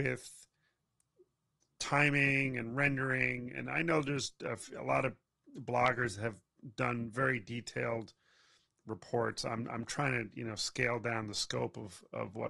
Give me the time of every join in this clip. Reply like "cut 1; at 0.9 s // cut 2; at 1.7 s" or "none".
none